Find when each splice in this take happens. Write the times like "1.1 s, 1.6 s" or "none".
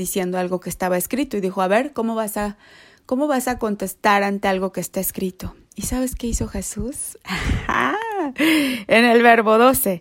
none